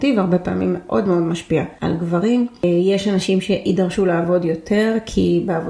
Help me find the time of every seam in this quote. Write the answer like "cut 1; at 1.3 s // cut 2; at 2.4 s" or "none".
none